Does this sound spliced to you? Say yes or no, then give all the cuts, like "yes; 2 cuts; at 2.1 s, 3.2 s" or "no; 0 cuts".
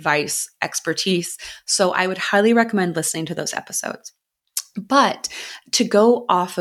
no; 0 cuts